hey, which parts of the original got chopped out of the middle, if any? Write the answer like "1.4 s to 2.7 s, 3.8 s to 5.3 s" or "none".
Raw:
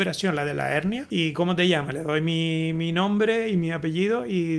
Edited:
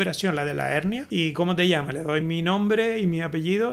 2.2 s to 2.7 s

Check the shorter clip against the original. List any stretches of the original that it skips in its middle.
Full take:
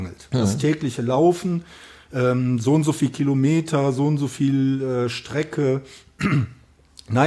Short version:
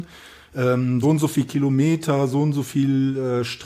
2.6 s to 2.7 s

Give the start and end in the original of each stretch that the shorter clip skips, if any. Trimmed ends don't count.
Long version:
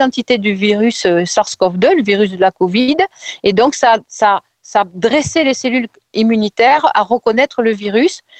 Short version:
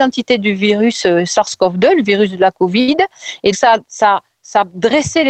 3.5 s to 3.7 s

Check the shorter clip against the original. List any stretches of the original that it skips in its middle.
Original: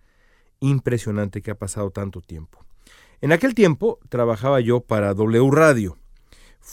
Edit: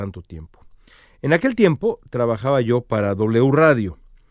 none

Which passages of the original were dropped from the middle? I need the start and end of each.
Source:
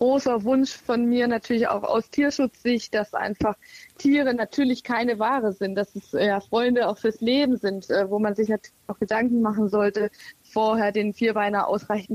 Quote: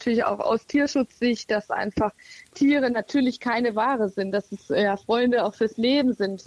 none

